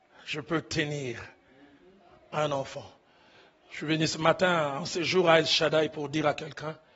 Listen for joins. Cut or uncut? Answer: uncut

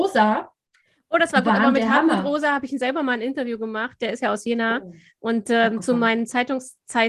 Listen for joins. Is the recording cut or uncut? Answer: uncut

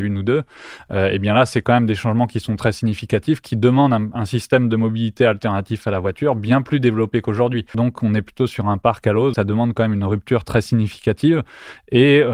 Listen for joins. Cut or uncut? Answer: cut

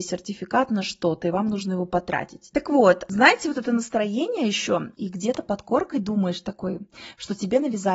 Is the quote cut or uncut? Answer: cut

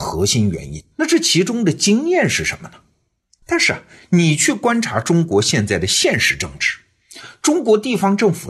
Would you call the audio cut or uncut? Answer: cut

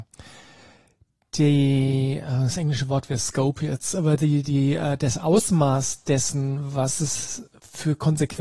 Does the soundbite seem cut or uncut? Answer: uncut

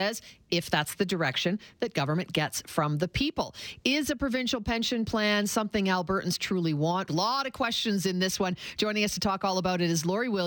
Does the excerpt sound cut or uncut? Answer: cut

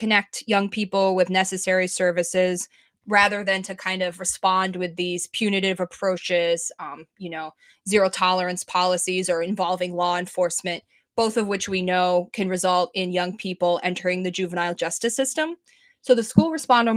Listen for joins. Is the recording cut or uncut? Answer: uncut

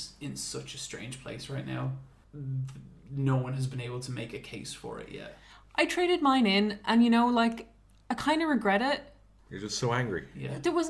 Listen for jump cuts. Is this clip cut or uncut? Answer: cut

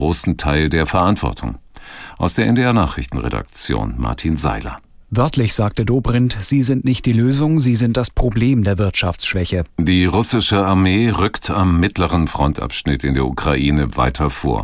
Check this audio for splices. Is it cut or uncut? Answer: cut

